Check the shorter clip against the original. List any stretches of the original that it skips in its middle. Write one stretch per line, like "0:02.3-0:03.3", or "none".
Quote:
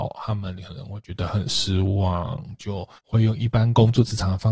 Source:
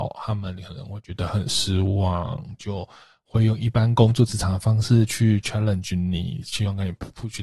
0:03.0-0:03.2